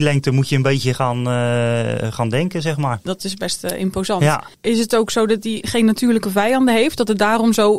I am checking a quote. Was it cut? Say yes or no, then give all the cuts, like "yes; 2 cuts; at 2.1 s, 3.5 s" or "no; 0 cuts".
yes; 1 cut; at 5.6 s